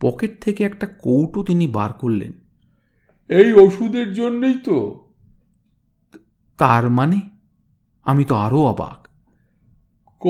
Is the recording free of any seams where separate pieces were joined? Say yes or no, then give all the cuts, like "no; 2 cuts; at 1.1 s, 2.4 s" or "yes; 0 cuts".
yes; 0 cuts